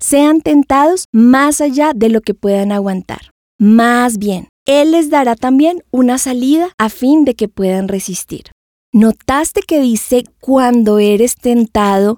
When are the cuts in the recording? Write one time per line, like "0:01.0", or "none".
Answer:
0:04.6